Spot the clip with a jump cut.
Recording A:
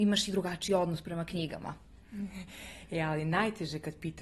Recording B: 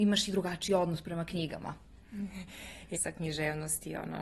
B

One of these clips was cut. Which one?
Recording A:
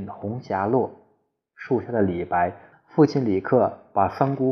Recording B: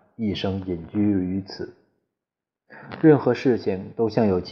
A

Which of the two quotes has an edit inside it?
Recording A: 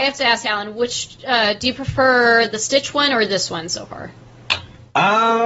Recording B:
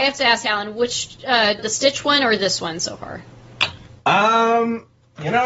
B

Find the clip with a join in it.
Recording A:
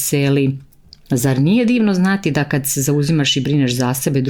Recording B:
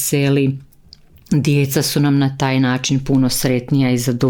A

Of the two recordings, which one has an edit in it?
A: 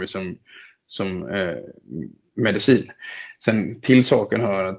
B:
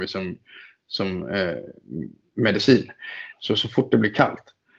B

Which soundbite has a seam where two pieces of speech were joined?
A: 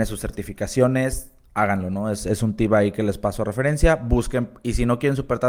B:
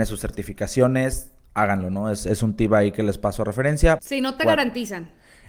B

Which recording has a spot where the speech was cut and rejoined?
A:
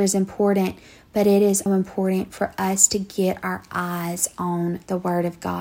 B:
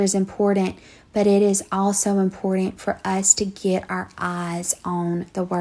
A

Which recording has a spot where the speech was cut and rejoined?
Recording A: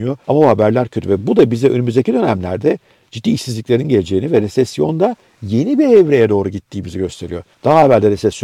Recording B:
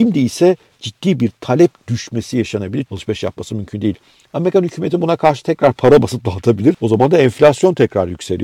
B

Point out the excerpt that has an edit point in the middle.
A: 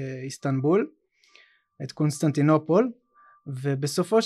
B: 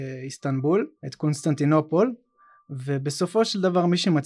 B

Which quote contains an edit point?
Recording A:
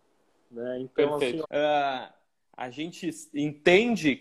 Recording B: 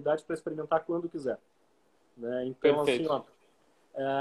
A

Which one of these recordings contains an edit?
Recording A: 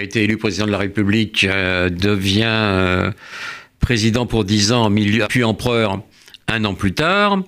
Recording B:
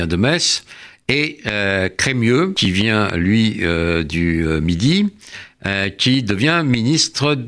A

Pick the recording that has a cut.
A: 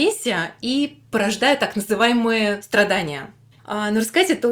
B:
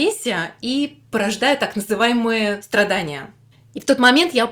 A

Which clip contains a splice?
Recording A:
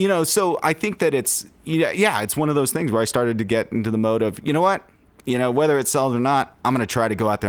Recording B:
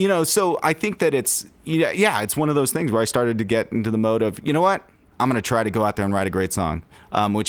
B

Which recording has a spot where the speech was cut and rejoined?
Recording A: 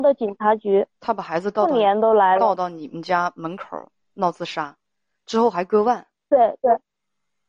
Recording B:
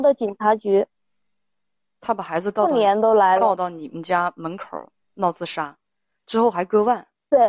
A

